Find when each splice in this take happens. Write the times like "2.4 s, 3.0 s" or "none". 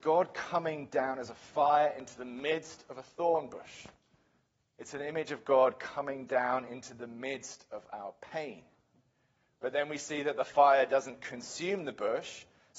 none